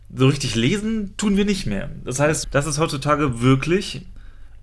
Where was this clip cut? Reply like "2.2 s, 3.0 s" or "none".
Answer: 2.4 s